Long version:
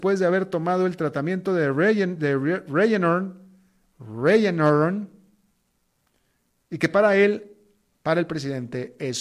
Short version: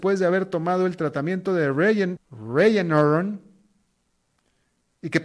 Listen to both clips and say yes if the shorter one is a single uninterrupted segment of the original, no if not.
no